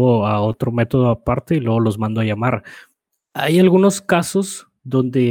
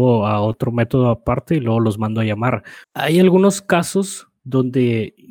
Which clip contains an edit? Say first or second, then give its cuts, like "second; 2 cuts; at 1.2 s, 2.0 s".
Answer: second; 1 cut; at 2.8 s